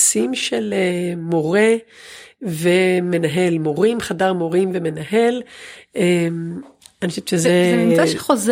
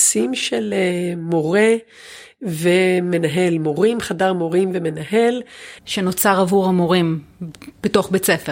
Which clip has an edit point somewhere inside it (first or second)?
second